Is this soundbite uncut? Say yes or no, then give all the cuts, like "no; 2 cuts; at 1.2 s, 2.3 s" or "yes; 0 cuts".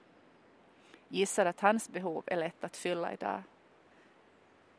yes; 0 cuts